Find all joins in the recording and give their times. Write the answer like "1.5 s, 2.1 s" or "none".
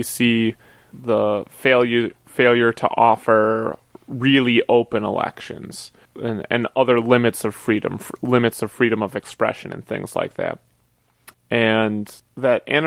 11.3 s